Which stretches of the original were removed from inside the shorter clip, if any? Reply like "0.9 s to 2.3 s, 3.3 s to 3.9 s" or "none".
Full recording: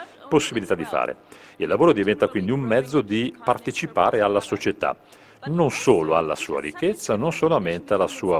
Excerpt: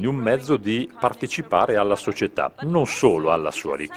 5.0 s to 5.4 s